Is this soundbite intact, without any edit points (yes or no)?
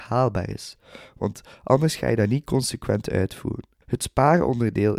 no